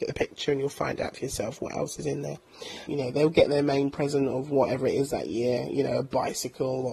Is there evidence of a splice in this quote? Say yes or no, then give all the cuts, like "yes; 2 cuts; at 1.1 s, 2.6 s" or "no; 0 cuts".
yes; 1 cut; at 2.9 s